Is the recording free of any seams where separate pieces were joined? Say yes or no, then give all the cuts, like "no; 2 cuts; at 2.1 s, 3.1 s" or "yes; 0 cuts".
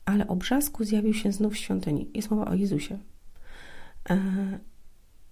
yes; 0 cuts